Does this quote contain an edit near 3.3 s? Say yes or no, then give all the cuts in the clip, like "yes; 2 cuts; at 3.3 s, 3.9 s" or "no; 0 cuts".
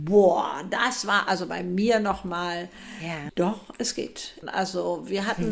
yes; 2 cuts; at 3.3 s, 4.4 s